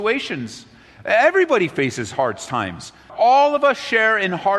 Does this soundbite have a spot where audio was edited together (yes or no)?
yes